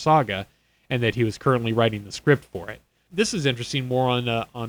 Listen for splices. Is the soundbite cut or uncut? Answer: cut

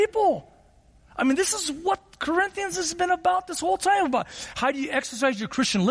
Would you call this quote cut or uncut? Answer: uncut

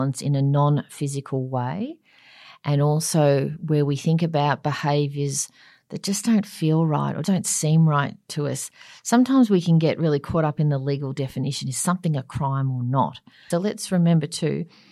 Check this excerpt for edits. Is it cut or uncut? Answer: cut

